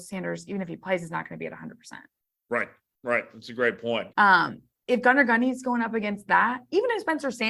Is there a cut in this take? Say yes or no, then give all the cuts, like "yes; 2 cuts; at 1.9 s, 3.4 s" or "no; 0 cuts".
yes; 1 cut; at 4.1 s